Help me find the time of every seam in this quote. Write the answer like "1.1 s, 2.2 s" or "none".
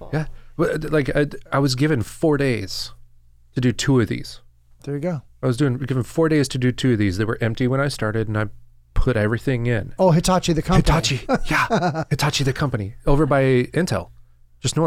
10.0 s